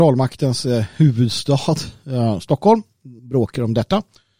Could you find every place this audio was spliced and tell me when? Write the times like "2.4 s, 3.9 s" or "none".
3.2 s

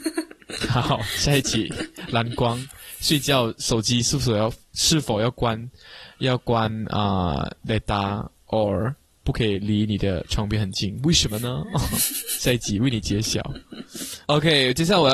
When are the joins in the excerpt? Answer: none

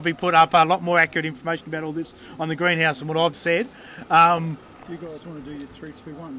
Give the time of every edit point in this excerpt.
3.3 s

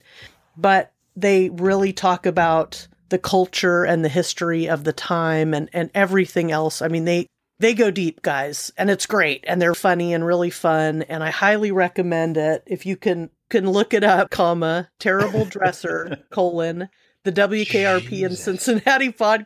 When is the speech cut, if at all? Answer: 9.7 s, 14.3 s

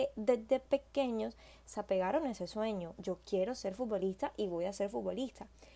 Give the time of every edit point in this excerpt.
3.0 s

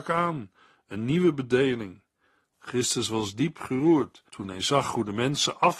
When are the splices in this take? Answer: 2.5 s, 4.3 s

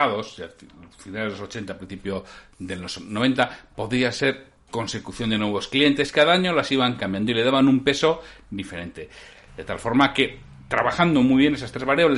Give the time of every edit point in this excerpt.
9.5 s

